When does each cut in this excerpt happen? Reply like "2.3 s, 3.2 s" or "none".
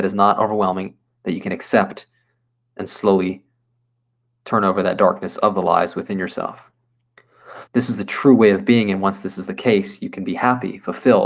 7.7 s